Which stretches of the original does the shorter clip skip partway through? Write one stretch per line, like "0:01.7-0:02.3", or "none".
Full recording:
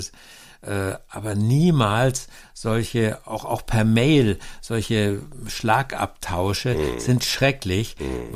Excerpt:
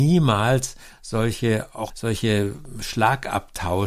0:03.4-0:04.6